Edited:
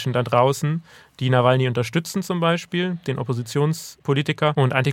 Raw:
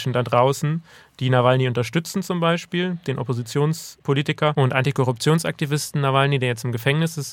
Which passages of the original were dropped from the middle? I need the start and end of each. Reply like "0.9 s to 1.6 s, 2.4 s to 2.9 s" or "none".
none